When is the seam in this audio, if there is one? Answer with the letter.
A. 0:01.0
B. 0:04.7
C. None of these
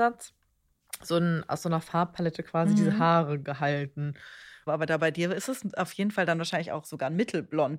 B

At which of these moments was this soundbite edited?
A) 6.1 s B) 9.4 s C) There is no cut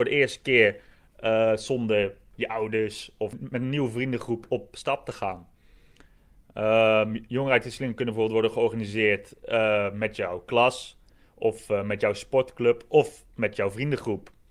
C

